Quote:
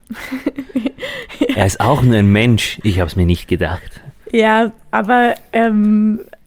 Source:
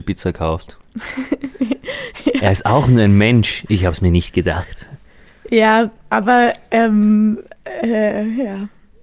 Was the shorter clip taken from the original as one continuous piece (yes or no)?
no